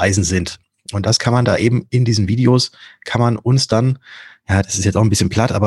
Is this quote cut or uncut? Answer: uncut